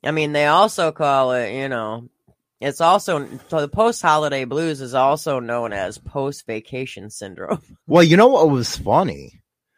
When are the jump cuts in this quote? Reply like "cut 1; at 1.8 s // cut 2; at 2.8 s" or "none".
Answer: cut 1; at 7.8 s